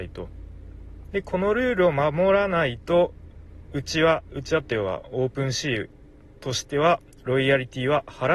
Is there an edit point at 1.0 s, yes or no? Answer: yes